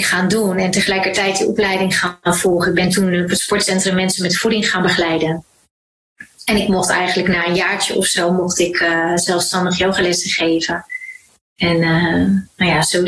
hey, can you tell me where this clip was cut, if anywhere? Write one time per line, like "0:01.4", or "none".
none